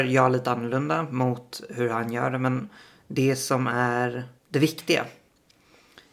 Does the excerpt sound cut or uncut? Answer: cut